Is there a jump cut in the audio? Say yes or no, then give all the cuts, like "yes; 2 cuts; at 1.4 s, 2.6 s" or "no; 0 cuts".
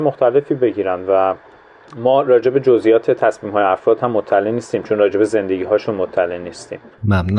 no; 0 cuts